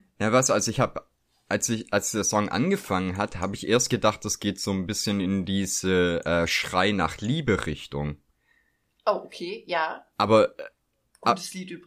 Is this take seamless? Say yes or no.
yes